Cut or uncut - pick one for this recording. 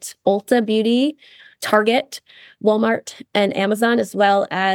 uncut